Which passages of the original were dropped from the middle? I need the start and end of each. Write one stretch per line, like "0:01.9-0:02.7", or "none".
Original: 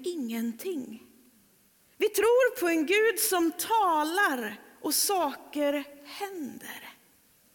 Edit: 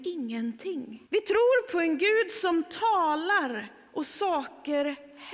0:01.1-0:01.9